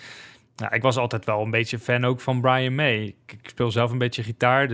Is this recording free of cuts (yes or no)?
yes